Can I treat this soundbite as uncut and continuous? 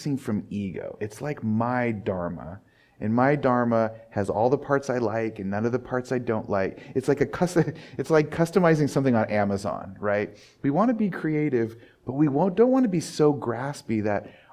yes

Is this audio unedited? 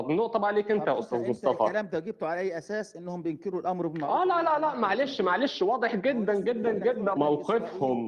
no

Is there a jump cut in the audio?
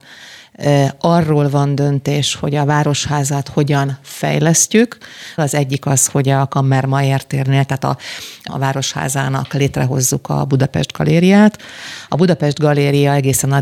yes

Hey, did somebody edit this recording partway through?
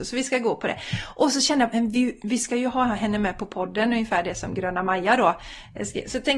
no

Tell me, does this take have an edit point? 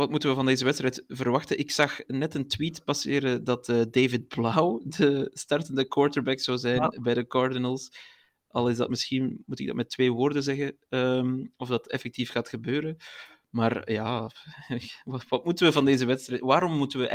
no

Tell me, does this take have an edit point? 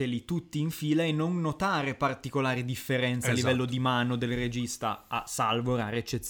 no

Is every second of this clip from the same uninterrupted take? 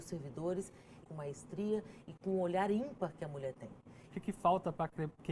no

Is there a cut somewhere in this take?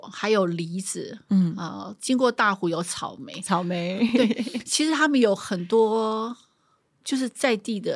no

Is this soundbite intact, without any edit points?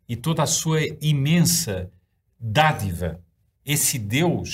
no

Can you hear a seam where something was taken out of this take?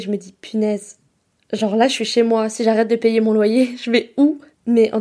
no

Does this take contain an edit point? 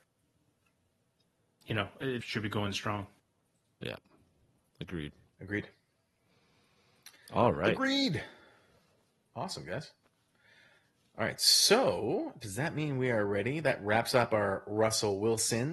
yes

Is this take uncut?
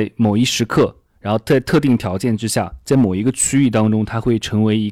yes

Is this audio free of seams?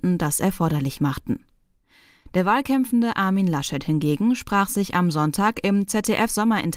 yes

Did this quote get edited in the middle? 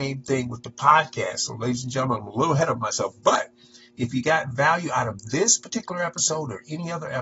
no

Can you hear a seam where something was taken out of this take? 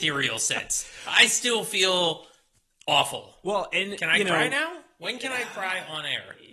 no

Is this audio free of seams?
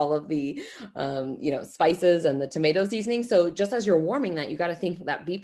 yes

